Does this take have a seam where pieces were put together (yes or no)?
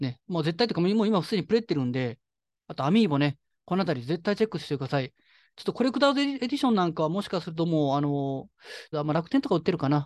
yes